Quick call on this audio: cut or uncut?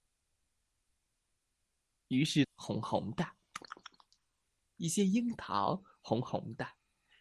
cut